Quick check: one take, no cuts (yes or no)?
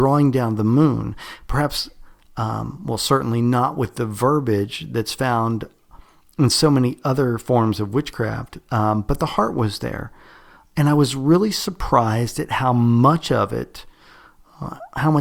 yes